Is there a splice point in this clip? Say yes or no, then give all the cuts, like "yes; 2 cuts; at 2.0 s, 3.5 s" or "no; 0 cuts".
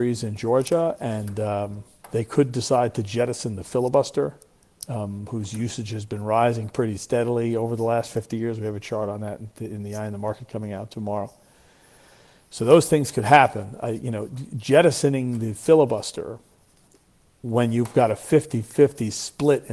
no; 0 cuts